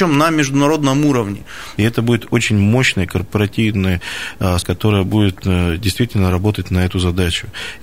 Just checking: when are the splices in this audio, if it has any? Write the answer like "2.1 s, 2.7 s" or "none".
1.8 s, 4.6 s

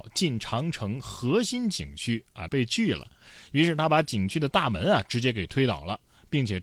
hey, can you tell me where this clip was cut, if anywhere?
2.5 s

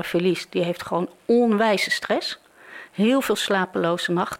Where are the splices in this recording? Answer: 2.9 s

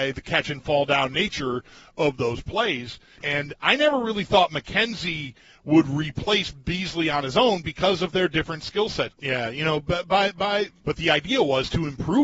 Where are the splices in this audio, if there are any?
3.2 s, 9.1 s, 10.8 s

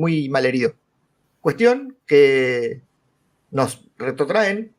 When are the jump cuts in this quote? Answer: 1.2 s

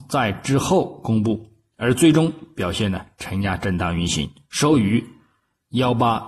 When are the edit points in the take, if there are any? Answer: none

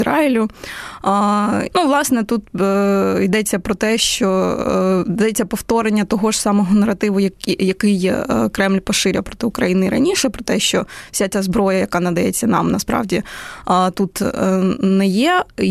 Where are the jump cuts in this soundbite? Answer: 1.7 s

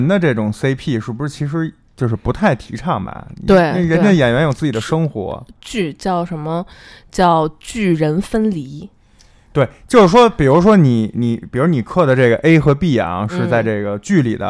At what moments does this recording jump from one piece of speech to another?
none

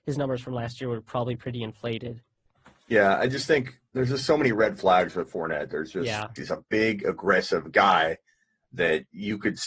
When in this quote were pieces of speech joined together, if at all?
6.4 s

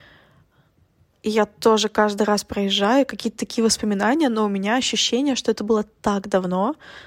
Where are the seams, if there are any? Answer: none

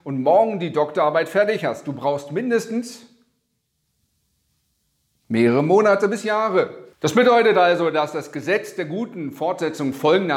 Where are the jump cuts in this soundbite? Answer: 6.9 s

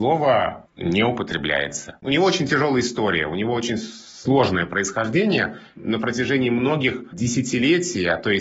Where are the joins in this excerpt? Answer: none

